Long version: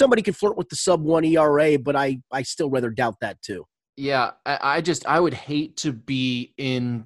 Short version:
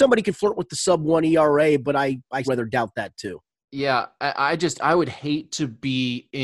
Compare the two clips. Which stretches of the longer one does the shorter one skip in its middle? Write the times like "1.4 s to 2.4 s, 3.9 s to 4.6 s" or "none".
2.4 s to 2.7 s